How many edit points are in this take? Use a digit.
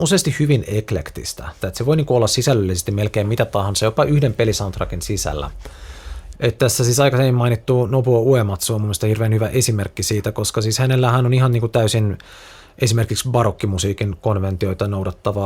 2